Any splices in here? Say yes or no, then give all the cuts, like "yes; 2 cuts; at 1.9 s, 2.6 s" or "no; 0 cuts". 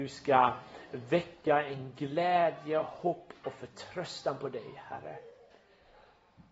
no; 0 cuts